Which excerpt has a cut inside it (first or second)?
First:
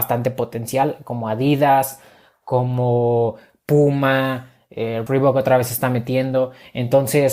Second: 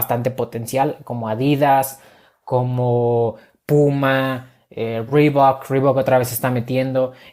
first